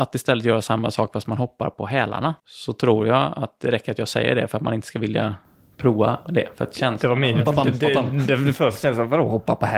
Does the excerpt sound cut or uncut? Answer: cut